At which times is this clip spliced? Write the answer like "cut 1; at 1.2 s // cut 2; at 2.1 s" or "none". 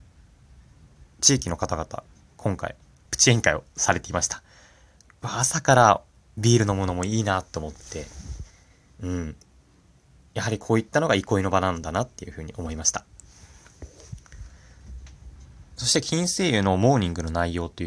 cut 1; at 3.1 s